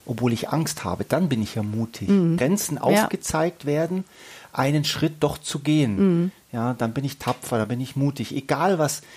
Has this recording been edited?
yes; 1 cut; at 2.4 s

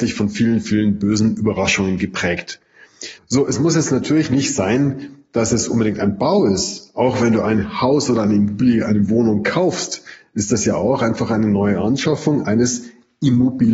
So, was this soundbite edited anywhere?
yes; 1 cut; at 3.2 s

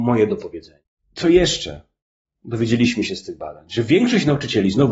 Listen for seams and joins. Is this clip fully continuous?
yes; 0 cuts

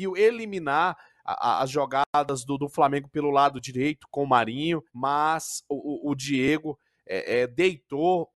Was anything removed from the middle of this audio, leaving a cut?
yes; 2 cuts; at 4.9 s, 6.0 s

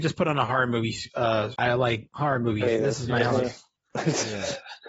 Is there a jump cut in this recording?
yes; 1 cut; at 1.5 s

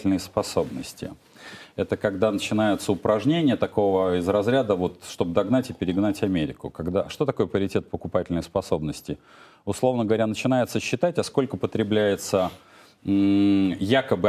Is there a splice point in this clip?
no; 0 cuts

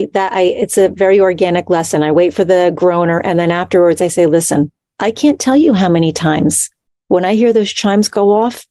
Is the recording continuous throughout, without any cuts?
yes; 0 cuts

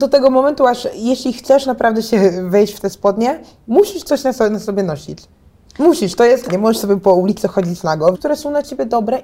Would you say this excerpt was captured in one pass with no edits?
no; 2 cuts; at 6.5 s, 8.1 s

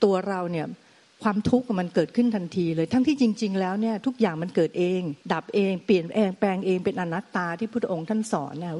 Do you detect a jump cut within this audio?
yes; 1 cut; at 5.2 s

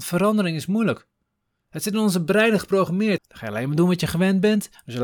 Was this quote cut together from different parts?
yes; 1 cut; at 3.2 s

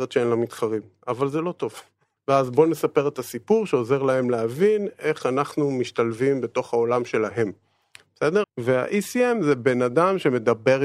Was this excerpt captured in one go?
no; 2 cuts; at 2.2 s, 8.4 s

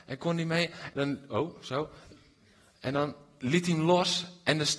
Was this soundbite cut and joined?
yes; 1 cut; at 0.9 s

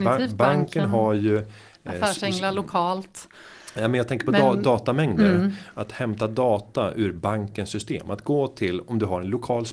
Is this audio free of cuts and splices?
yes; 0 cuts

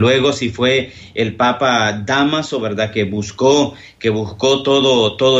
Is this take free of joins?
yes; 0 cuts

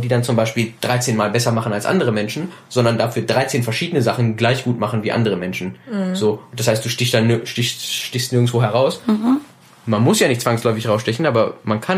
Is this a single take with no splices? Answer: yes; 0 cuts

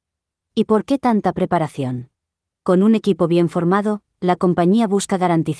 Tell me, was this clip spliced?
yes; 1 cut; at 2.5 s

